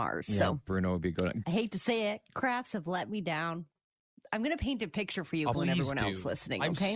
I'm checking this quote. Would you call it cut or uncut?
cut